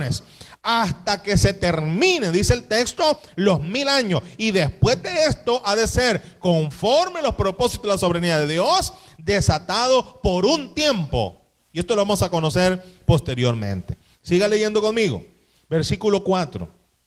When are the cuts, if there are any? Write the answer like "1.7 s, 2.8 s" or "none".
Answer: none